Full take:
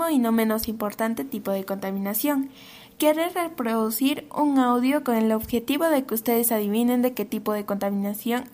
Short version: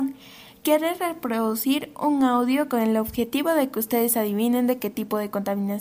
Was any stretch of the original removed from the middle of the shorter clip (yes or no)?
no